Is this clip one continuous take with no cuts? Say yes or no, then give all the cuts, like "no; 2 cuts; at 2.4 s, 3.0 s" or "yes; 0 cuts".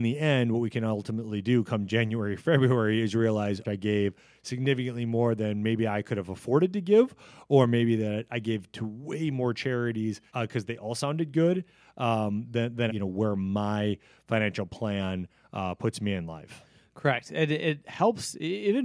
no; 3 cuts; at 3.6 s, 10.3 s, 12.9 s